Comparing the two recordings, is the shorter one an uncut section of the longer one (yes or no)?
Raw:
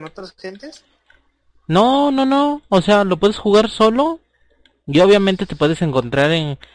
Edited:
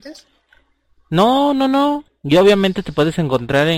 no